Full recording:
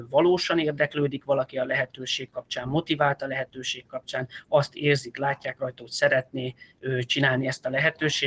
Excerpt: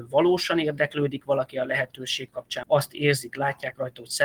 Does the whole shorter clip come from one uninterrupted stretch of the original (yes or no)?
no